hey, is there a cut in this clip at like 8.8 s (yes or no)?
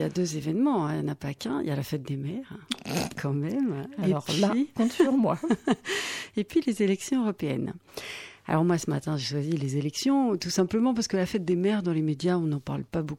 no